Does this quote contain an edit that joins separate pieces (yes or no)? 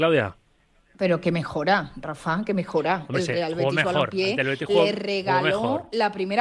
no